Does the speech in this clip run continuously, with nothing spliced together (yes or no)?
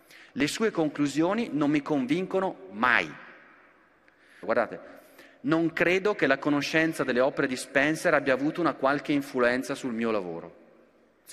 no